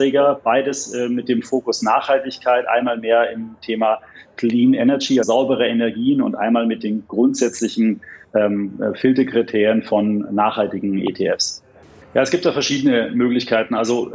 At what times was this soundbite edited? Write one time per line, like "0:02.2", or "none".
0:05.2
0:12.0

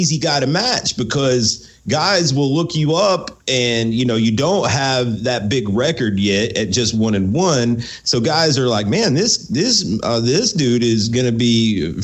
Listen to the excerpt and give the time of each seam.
none

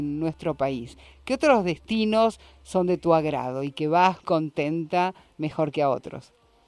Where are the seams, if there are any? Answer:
0:04.2

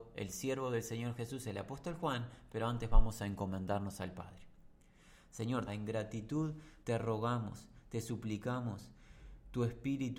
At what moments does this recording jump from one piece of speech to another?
0:05.7
0:06.8

